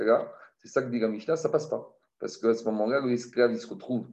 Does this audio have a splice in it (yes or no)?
no